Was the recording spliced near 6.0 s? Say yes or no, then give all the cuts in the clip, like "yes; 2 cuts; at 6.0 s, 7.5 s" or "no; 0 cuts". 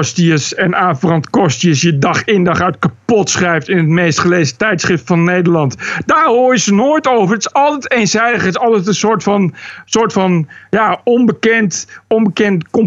no; 0 cuts